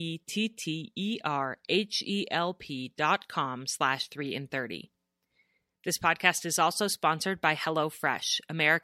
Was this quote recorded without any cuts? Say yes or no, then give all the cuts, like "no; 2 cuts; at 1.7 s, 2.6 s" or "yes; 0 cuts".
yes; 0 cuts